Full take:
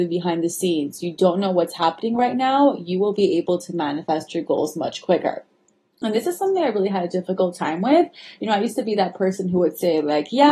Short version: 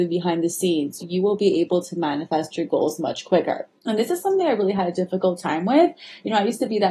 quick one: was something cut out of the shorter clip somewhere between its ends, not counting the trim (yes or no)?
yes